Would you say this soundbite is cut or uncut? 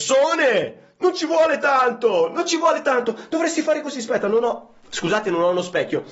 uncut